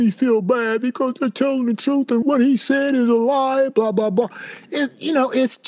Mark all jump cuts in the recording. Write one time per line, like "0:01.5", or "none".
0:02.2